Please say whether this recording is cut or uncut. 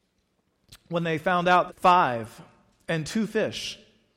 cut